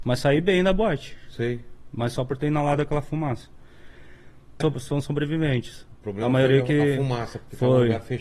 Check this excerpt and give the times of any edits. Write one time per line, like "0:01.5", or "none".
0:04.6